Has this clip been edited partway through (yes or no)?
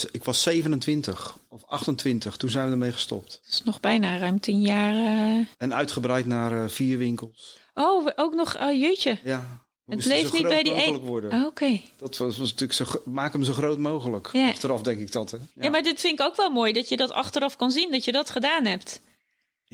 no